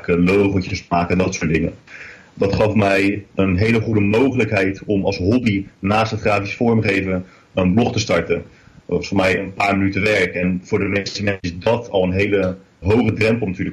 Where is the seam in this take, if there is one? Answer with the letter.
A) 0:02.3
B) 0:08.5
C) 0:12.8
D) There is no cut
C